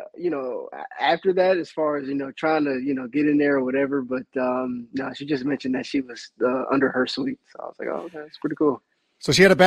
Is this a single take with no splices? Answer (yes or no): yes